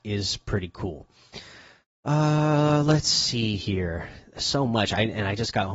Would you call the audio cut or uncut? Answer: uncut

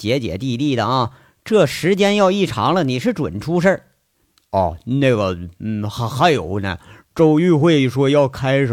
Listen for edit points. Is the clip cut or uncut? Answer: uncut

